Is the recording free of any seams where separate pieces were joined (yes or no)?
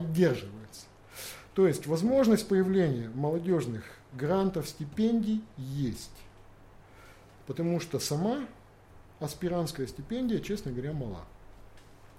yes